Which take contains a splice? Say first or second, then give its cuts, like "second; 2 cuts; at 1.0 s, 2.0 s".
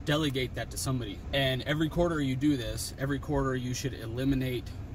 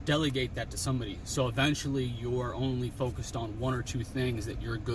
first; 1 cut; at 1.2 s